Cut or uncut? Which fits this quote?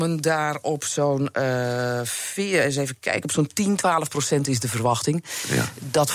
uncut